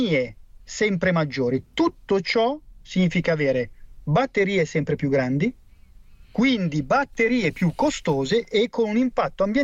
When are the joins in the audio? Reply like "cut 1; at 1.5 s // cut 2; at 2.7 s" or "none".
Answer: cut 1; at 6.2 s